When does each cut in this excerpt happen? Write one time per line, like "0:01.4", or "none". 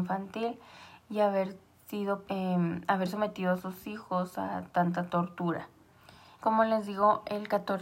0:02.2
0:06.3